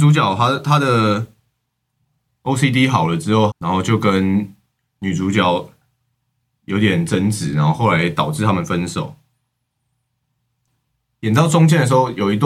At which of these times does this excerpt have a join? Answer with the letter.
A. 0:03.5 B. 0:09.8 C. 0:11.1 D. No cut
A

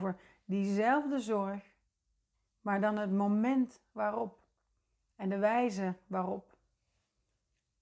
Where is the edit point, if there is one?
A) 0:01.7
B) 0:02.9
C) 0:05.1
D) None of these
D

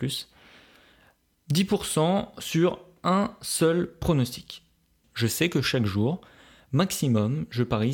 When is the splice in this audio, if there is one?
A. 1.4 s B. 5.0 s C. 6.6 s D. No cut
B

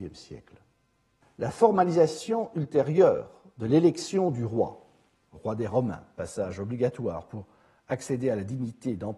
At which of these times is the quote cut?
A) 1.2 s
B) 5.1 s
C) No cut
A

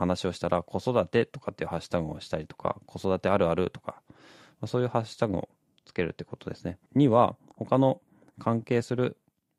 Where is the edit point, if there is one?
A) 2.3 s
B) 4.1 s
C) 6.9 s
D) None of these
C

